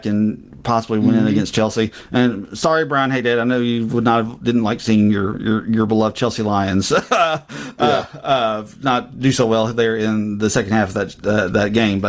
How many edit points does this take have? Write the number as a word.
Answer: zero